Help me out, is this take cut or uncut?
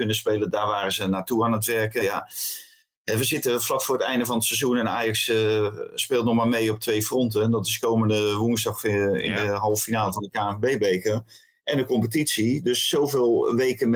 uncut